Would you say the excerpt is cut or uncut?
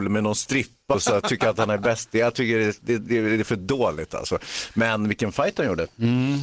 cut